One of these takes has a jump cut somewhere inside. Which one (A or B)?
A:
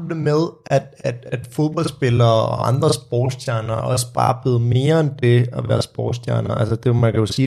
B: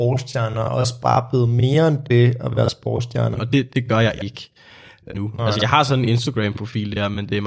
B